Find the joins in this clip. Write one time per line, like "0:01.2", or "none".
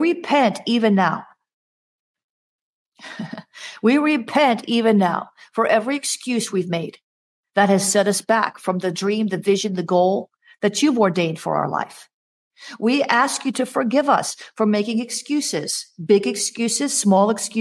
none